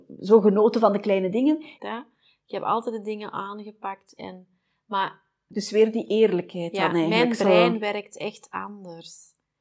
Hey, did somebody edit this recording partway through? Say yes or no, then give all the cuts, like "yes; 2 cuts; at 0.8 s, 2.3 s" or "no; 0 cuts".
yes; 1 cut; at 1.8 s